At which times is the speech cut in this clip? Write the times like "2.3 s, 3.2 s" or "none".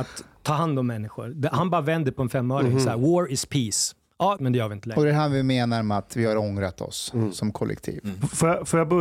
4.4 s